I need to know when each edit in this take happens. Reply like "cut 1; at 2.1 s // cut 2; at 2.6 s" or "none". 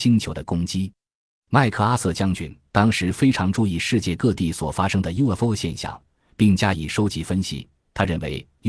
none